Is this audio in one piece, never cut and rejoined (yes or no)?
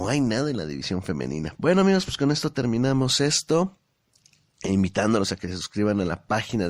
no